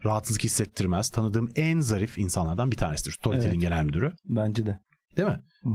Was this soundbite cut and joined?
no; 0 cuts

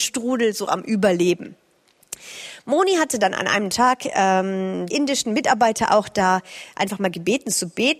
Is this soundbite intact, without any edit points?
no; 1 cut; at 4.9 s

